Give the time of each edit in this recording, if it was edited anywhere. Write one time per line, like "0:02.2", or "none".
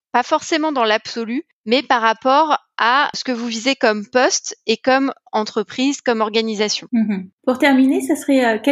none

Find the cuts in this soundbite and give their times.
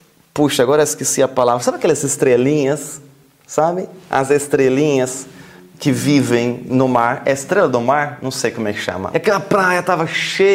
0:09.1

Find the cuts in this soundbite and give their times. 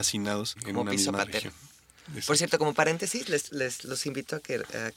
none

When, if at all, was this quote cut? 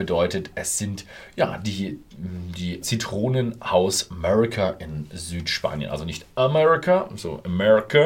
0:02.8

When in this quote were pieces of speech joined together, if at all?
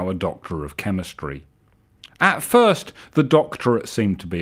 0:02.1

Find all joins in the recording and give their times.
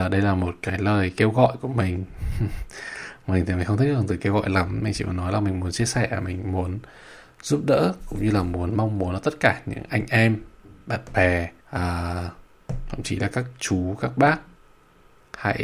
0:11.6

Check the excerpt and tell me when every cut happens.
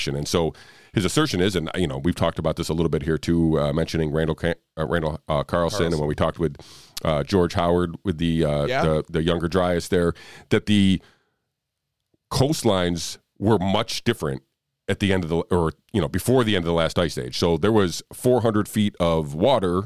none

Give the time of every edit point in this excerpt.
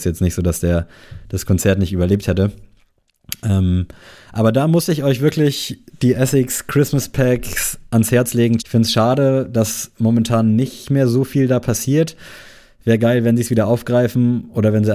0:08.6

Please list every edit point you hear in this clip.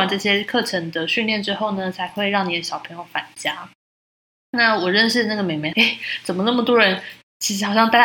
0:05.7

